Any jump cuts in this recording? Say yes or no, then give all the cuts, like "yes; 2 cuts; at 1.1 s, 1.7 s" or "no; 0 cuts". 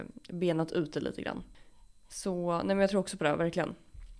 no; 0 cuts